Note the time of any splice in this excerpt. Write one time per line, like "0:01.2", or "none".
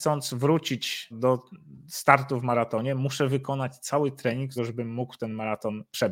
0:01.1
0:04.6